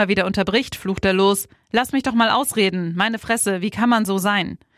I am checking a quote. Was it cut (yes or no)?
no